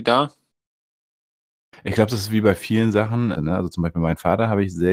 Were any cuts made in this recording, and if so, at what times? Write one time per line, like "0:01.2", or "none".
0:03.3